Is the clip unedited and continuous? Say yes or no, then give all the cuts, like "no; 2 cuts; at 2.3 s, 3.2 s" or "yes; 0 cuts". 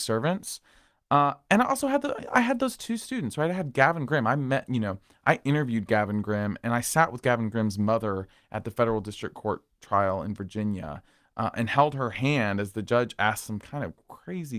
yes; 0 cuts